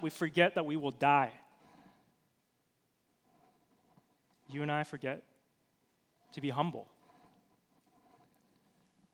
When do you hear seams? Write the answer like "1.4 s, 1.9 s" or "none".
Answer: none